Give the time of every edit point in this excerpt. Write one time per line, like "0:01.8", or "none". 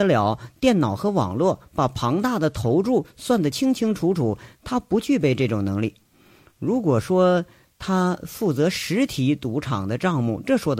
none